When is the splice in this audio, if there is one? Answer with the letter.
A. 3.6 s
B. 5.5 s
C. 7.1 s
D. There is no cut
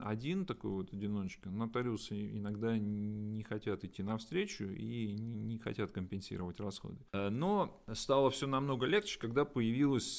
C